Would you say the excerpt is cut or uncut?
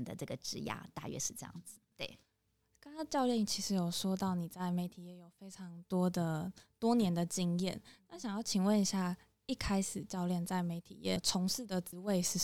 uncut